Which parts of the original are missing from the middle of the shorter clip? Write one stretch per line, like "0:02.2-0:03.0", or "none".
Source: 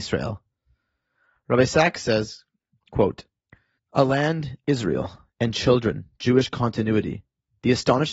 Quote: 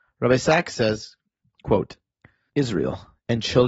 0:03.8-0:04.6